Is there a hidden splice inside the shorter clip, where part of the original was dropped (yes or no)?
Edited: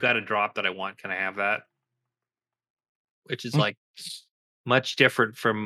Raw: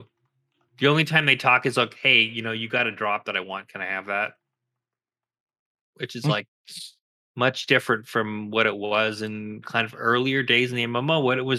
no